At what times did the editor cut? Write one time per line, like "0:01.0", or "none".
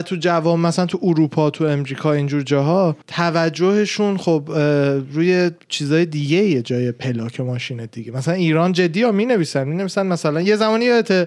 0:03.0